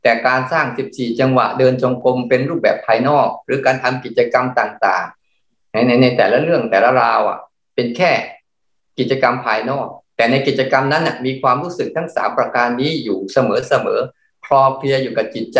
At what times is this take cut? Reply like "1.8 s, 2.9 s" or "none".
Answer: 5.2 s